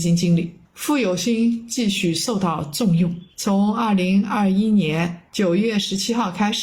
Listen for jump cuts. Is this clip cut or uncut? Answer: uncut